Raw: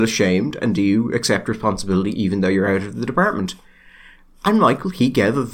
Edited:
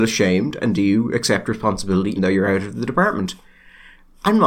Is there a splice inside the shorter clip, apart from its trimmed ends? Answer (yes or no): yes